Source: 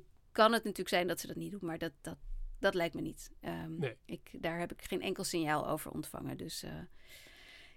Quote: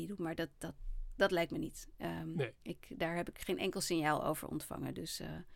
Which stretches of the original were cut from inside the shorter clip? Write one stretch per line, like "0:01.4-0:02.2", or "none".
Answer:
none